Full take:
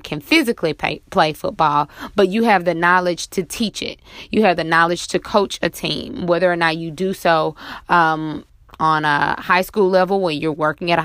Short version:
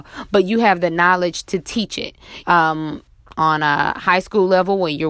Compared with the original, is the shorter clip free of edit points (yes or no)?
no